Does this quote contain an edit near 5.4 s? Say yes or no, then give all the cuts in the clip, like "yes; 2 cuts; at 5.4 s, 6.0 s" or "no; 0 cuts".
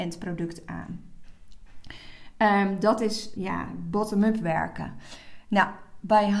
no; 1 cut; at 3.3 s